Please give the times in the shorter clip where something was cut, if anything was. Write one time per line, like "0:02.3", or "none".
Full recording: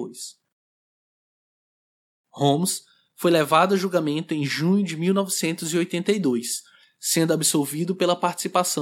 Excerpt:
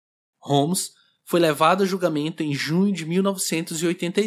none